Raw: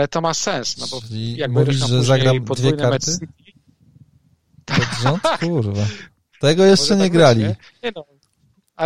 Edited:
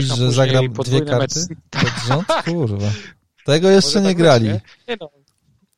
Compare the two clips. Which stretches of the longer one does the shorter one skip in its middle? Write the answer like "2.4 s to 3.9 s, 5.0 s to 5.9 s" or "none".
3.4 s to 4.6 s

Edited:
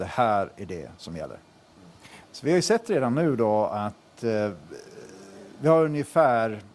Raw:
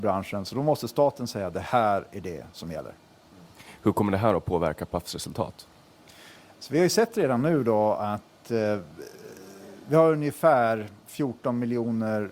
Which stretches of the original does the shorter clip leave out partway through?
3.8 s to 6.5 s

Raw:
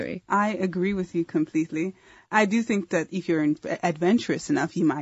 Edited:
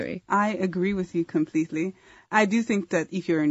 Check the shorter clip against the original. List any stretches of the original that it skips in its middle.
none

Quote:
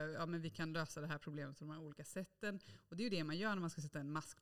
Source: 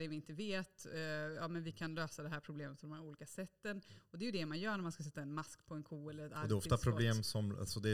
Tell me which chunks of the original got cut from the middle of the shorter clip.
none

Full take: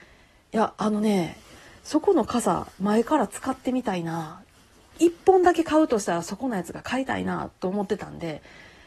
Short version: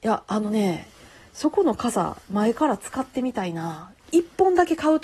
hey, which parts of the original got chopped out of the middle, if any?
4.5 s to 4.9 s

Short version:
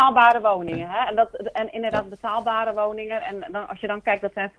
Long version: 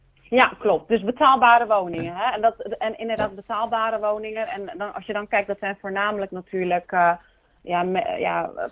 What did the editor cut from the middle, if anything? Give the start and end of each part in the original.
none

